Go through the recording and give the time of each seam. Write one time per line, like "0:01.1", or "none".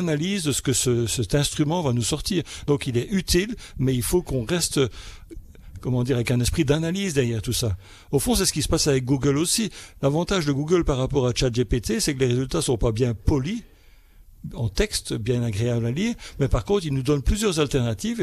none